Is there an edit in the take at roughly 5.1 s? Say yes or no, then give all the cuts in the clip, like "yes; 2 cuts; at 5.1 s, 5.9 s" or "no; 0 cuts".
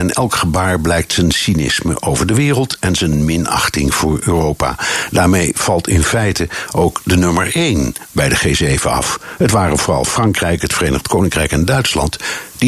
no; 0 cuts